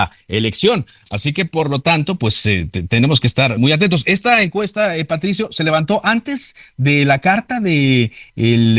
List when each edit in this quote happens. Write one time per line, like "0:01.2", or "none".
0:03.6